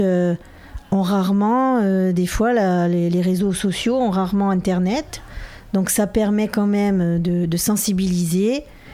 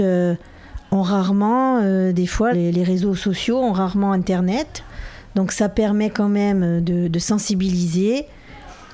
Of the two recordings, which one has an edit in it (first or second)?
second